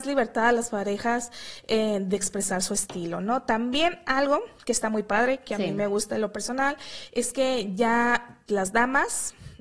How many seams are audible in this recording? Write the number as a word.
one